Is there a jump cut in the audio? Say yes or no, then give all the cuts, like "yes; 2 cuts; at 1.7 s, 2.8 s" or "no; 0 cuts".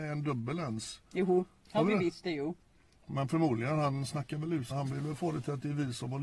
yes; 2 cuts; at 3.0 s, 4.7 s